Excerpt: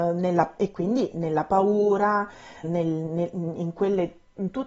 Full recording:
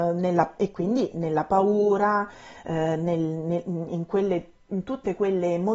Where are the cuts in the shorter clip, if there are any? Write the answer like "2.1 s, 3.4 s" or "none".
2.6 s